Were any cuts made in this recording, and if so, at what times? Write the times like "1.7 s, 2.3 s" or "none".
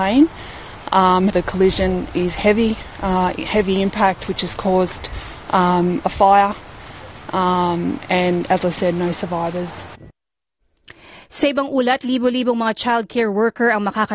1.3 s